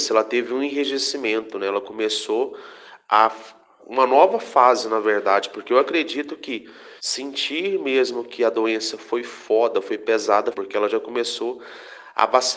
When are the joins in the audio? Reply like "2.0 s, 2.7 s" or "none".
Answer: 3.8 s, 7.0 s, 10.5 s